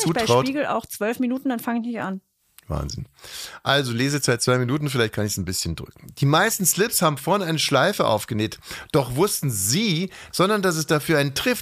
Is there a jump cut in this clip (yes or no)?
yes